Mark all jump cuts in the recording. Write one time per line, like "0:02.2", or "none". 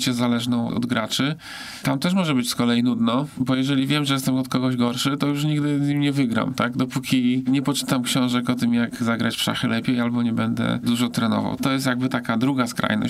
0:11.6

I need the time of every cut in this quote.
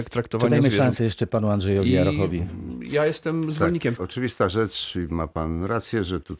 0:04.0

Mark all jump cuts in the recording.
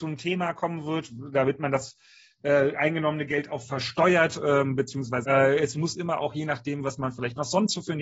0:05.2

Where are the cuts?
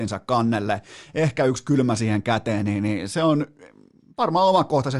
none

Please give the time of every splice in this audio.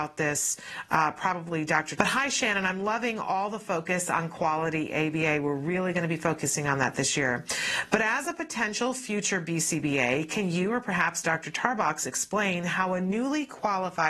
0:02.0

